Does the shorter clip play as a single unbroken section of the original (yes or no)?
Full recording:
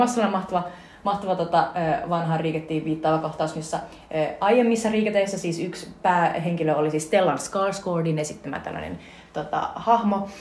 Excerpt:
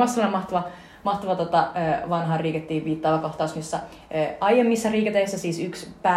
yes